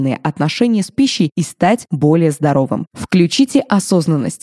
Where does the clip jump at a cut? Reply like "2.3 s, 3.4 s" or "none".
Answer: none